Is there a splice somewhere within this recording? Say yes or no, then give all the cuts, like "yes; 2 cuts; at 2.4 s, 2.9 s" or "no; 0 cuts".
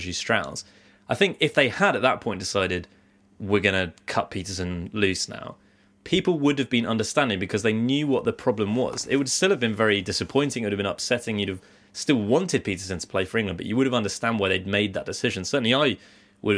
no; 0 cuts